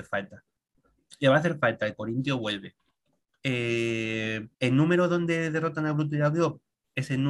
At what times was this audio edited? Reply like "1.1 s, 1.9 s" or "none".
3.3 s, 4.5 s